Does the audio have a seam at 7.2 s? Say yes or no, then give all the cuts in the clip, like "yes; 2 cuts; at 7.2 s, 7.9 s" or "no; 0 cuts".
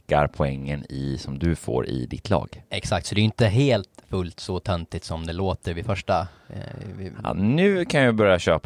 no; 0 cuts